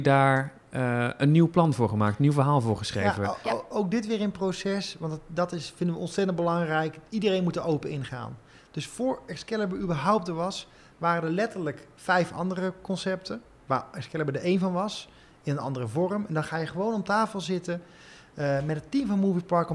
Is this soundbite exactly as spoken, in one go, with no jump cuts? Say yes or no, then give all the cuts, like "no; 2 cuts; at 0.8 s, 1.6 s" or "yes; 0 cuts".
yes; 0 cuts